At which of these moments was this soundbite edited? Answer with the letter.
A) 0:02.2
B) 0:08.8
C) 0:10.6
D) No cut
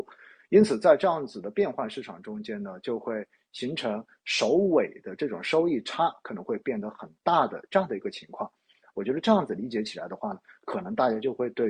B